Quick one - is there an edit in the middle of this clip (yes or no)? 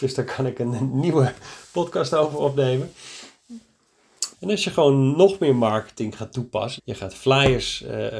yes